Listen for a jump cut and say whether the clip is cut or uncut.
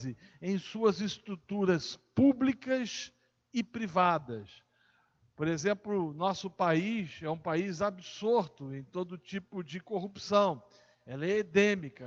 uncut